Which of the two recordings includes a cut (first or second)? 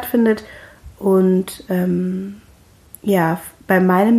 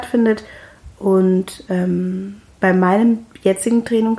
second